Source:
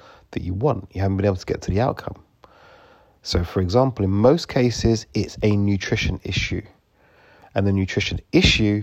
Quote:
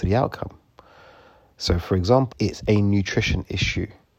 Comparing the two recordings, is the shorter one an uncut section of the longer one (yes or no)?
no